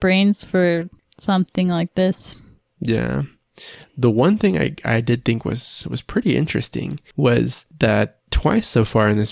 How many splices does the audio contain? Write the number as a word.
zero